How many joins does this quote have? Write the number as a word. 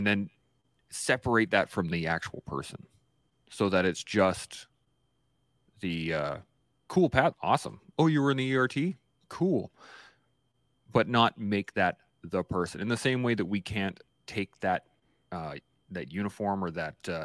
one